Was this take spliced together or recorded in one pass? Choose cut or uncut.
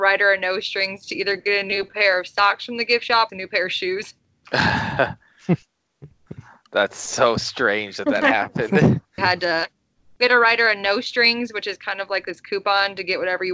cut